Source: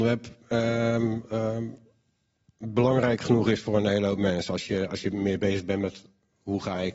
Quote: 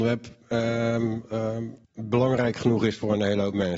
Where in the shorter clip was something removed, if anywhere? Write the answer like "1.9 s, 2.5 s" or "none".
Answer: 1.8 s